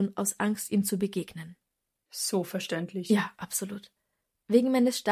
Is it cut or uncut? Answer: uncut